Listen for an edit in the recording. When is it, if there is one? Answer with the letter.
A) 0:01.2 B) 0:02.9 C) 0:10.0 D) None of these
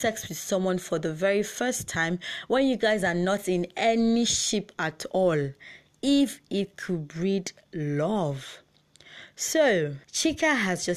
C